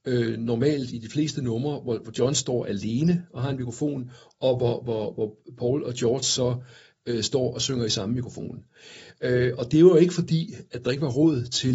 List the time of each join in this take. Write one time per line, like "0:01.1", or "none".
none